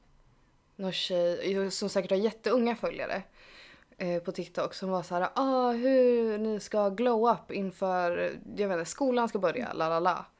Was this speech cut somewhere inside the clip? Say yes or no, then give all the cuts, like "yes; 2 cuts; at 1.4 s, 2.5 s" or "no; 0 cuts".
no; 0 cuts